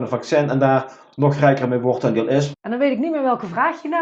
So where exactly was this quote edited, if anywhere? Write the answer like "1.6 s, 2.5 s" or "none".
2.5 s